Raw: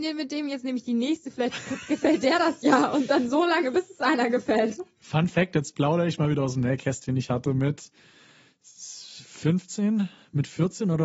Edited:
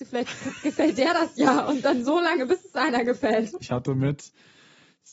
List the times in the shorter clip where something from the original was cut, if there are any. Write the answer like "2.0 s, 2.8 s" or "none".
3.6 s